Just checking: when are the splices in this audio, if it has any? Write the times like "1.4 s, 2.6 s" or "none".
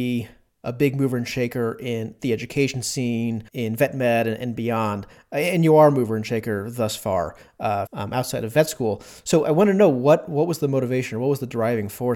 3.5 s, 7.9 s